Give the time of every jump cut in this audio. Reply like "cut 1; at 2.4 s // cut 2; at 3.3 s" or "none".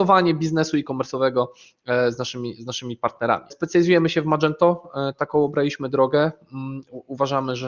cut 1; at 3.5 s